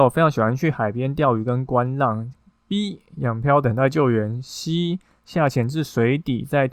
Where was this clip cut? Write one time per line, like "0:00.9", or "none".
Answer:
0:02.5